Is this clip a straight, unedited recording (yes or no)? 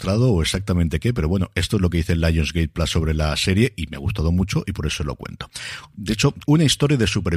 no